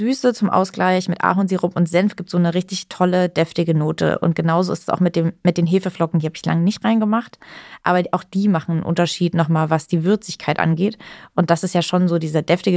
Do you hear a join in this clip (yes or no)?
no